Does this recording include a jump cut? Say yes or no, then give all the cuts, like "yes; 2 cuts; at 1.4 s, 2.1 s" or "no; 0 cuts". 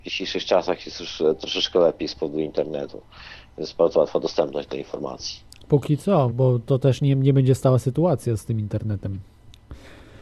yes; 1 cut; at 6.3 s